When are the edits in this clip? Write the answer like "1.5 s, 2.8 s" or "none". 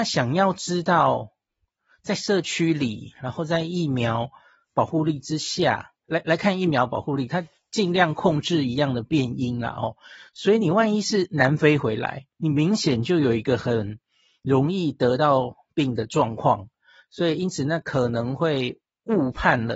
none